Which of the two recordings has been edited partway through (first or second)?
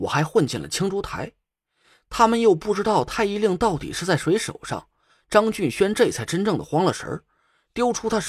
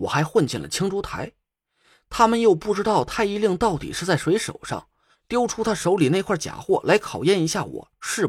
second